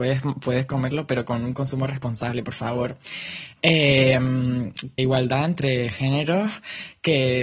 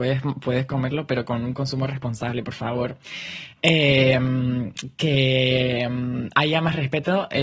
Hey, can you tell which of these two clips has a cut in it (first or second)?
first